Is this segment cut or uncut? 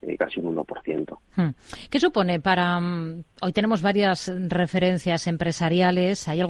uncut